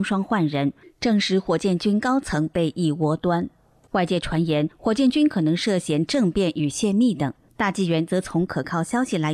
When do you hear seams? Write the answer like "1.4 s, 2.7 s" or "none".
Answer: none